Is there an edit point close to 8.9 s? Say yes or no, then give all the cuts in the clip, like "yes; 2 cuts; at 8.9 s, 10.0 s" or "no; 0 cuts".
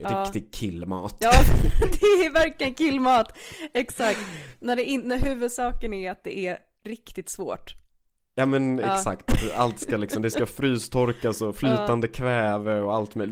no; 0 cuts